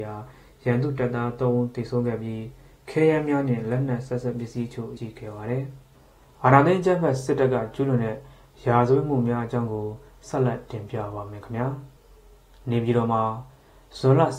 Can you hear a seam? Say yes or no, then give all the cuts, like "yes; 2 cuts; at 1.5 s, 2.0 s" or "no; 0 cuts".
yes; 2 cuts; at 5.0 s, 12.0 s